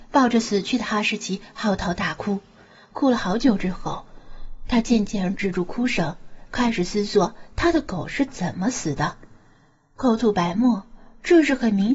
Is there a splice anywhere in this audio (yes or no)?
no